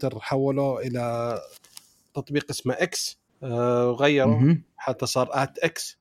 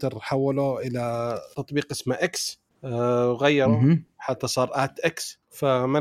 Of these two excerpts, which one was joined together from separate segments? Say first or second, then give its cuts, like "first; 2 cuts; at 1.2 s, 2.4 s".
second; 1 cut; at 1.5 s